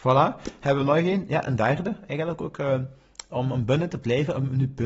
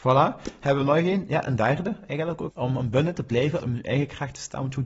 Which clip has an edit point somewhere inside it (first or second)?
second